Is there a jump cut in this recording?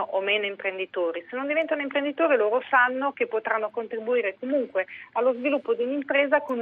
no; 0 cuts

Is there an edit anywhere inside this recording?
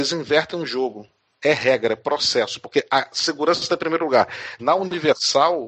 yes; 2 cuts; at 1.4 s, 4.6 s

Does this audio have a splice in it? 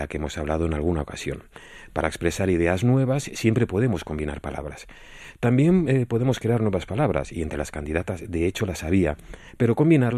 no; 0 cuts

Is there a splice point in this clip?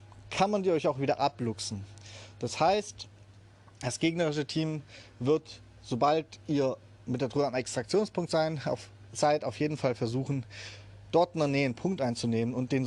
no; 0 cuts

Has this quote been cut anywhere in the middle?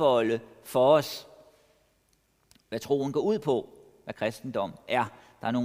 no; 0 cuts

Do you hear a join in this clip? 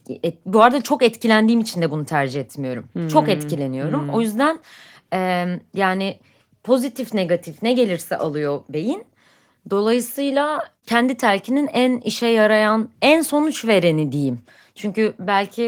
no; 0 cuts

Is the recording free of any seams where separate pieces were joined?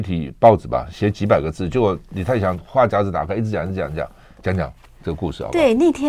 yes; 0 cuts

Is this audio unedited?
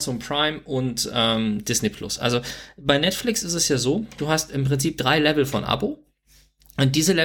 yes; 0 cuts

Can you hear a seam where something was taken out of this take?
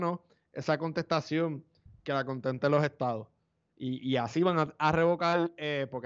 no; 0 cuts

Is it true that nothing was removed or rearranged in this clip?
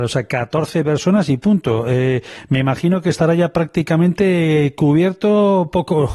yes; 0 cuts

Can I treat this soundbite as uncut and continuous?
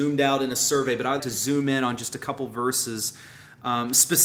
no; 1 cut; at 1.2 s

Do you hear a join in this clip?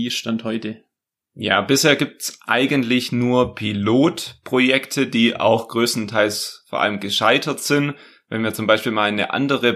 no; 0 cuts

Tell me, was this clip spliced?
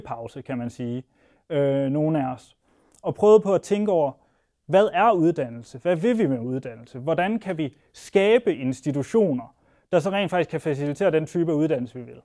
no; 0 cuts

